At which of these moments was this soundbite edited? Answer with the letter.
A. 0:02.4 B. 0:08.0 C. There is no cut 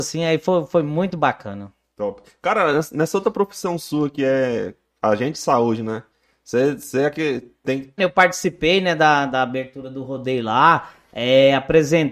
B